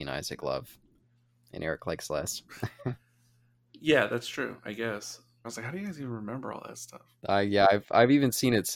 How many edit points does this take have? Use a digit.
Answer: 2